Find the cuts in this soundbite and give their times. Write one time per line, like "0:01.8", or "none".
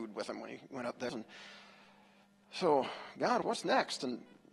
0:01.1
0:03.4

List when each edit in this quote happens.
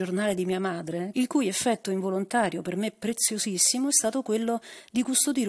0:01.1

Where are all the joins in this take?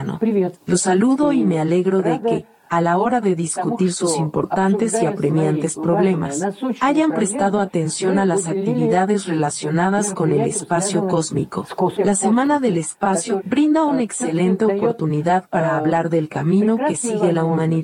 none

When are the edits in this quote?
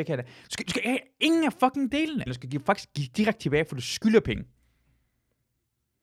0:02.3

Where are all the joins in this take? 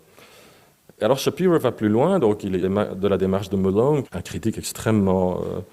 0:02.6
0:04.0

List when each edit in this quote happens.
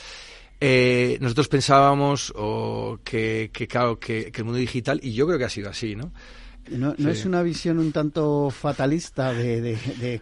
0:06.6

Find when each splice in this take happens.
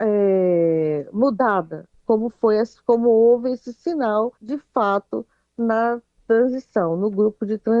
0:02.0
0:04.4

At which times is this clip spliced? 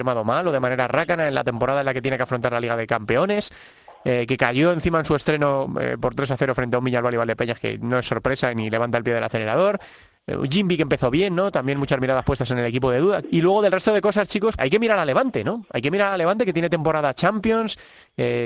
0:13.2
0:14.6

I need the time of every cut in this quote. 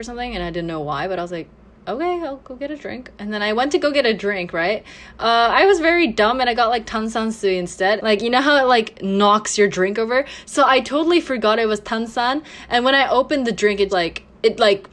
0:08.0
0:13.9

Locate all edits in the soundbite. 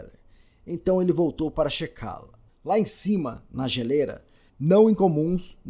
0:02.5
0:04.5

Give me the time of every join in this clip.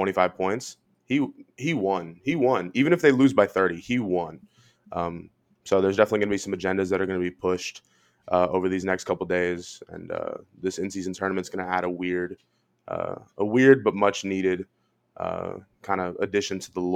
none

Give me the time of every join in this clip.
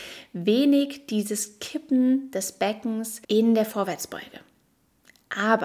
0:03.2

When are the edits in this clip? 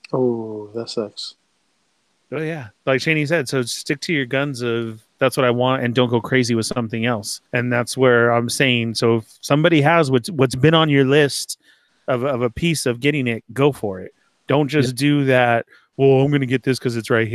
0:07.5

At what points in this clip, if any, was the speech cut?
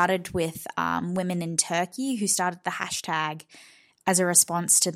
none

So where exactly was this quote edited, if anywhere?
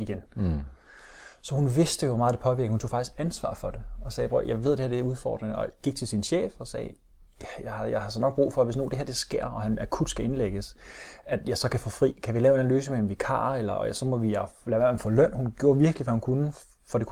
none

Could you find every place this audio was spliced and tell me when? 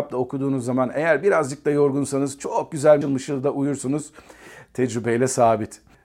0:03.0

